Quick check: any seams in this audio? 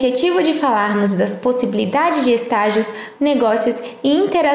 yes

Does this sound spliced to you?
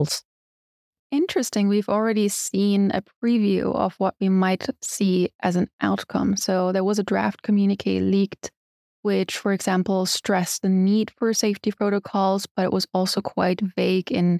no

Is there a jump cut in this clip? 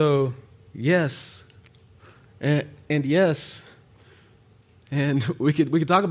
yes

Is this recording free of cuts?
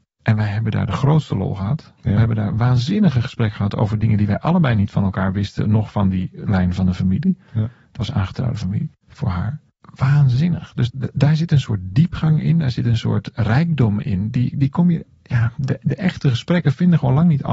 no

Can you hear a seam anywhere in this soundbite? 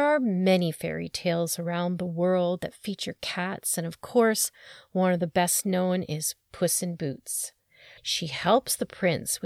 yes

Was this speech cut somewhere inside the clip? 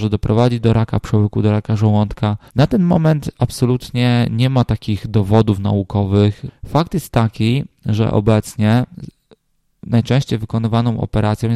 yes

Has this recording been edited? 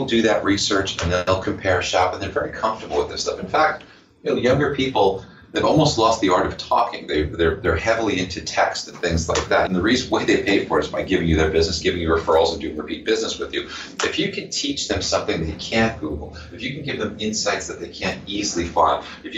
yes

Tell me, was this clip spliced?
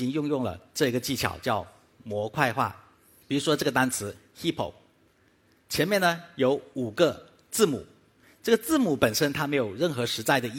yes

